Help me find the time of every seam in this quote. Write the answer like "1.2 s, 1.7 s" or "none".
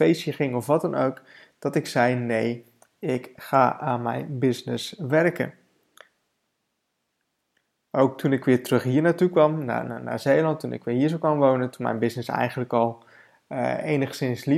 none